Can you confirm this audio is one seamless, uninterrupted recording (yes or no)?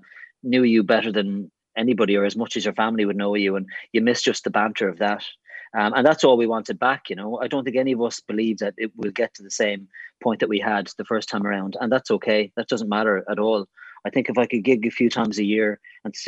yes